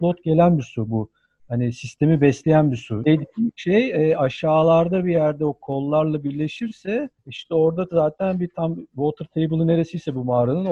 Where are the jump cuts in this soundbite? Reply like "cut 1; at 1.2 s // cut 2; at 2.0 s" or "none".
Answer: cut 1; at 3.0 s // cut 2; at 7.2 s